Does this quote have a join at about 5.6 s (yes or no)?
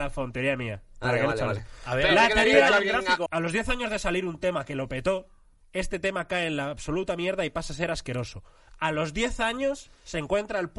yes